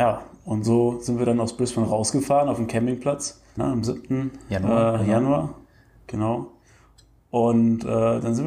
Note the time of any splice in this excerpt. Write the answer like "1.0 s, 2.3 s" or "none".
3.6 s